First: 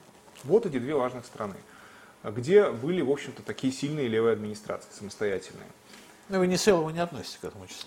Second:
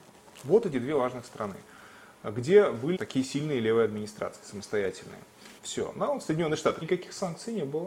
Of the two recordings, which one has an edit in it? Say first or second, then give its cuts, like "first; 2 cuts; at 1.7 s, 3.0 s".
second; 3 cuts; at 3.0 s, 5.6 s, 6.8 s